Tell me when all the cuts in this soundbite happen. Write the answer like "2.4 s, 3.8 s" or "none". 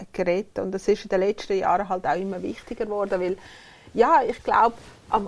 none